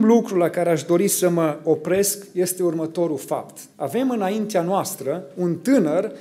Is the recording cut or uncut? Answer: cut